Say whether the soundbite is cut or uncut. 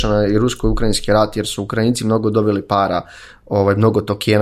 uncut